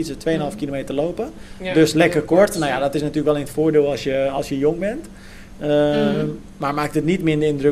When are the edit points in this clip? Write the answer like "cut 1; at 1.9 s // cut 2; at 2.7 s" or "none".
none